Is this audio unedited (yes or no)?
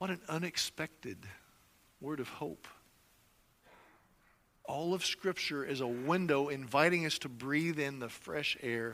yes